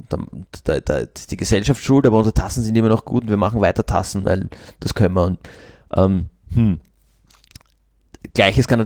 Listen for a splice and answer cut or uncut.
uncut